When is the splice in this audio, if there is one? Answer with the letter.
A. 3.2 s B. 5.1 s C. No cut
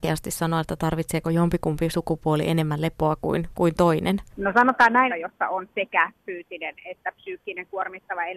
B